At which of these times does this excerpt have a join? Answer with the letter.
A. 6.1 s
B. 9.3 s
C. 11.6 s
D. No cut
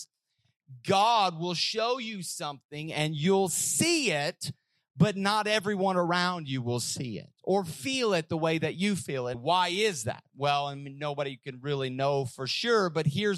B